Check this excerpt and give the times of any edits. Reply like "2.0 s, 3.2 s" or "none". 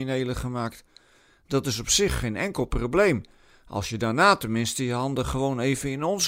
none